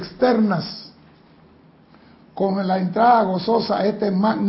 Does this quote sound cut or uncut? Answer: uncut